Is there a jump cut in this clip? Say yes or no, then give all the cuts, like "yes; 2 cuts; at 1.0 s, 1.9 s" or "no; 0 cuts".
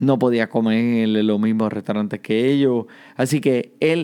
no; 0 cuts